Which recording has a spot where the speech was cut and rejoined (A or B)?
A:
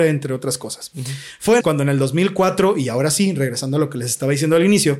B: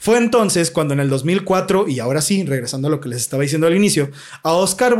A